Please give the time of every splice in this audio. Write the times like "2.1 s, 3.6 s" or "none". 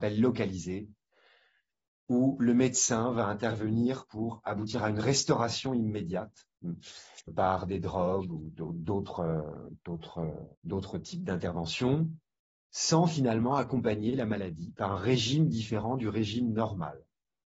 7.3 s, 10.5 s